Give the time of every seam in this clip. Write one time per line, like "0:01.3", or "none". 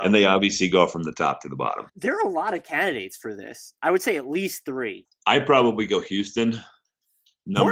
0:01.9
0:05.1